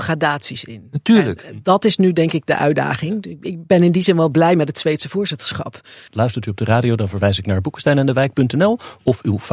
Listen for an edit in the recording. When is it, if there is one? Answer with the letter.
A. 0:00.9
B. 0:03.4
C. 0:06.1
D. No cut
C